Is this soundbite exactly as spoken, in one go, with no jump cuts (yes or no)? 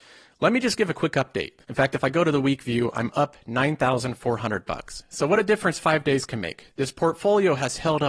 no